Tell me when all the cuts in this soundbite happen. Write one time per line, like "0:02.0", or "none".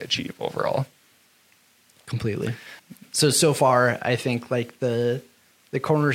0:02.8